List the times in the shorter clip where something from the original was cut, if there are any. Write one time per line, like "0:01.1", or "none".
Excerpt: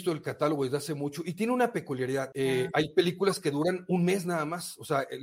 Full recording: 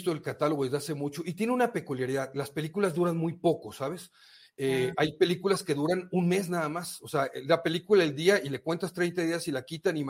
0:02.3